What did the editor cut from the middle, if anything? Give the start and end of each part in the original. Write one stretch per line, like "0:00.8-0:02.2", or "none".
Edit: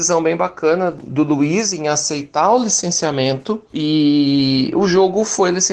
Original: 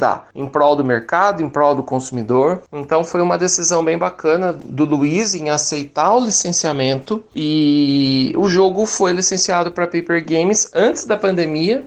none